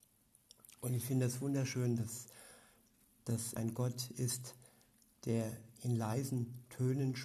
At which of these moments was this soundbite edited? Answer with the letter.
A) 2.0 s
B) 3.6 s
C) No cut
B